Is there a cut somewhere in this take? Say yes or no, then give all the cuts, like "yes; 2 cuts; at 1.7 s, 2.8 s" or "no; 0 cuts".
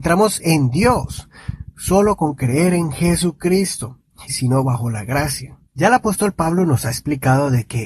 yes; 2 cuts; at 4.3 s, 5.7 s